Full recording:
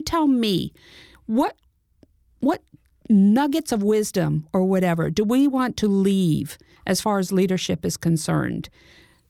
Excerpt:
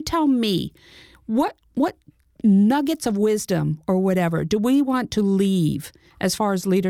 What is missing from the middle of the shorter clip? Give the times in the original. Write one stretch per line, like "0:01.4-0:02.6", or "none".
0:01.7-0:02.3